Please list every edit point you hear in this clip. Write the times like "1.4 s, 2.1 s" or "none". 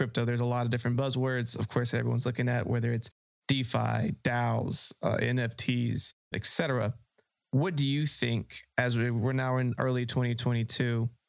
none